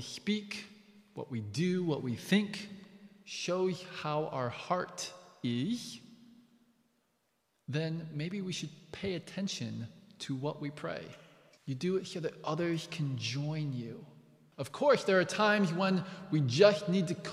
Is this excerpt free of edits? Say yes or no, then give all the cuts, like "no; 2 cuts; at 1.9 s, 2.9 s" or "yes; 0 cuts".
no; 2 cuts; at 11.6 s, 14.5 s